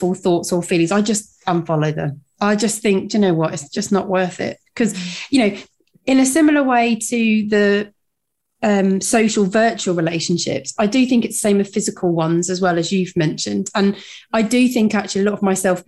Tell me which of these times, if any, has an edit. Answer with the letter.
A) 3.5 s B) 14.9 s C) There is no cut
C